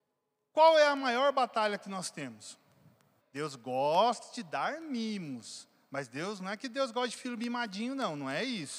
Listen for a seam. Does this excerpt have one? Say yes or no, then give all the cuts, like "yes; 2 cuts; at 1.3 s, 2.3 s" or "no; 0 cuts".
yes; 1 cut; at 3.2 s